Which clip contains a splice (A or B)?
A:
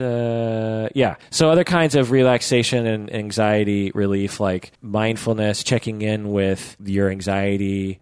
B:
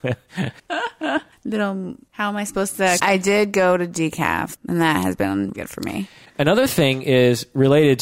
B